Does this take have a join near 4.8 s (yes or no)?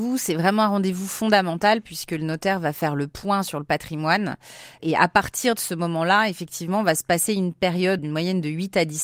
no